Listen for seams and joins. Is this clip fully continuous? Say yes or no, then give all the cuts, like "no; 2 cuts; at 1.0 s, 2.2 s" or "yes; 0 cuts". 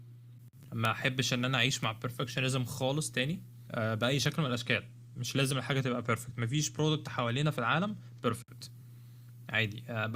no; 1 cut; at 3.7 s